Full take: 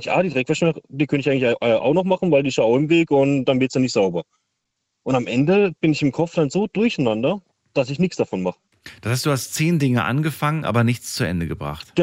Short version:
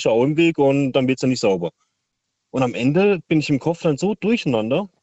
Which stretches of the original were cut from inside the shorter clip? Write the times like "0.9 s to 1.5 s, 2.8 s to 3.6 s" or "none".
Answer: none